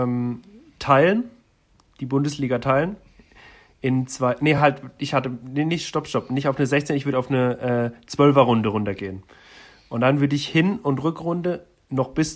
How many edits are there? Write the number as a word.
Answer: zero